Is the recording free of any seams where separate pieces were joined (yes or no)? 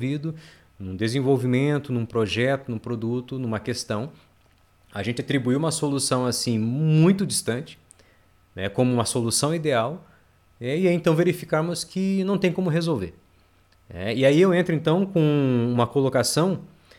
yes